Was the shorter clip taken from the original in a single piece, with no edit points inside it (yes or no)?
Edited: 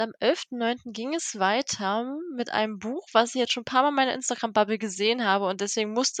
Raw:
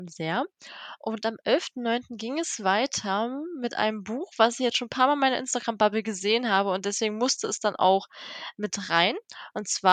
yes